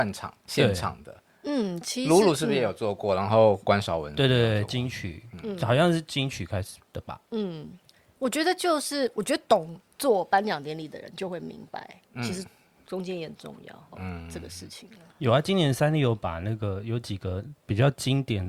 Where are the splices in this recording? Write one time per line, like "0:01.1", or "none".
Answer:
0:13.9